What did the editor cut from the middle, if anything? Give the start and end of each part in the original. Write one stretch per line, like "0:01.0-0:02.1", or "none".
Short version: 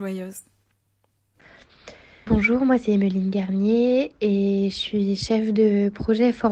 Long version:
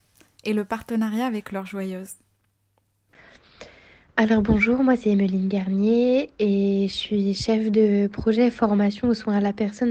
0:04.0-0:04.4